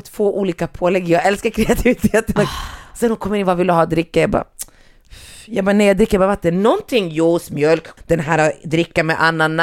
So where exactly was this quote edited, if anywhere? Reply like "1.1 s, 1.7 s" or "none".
8.0 s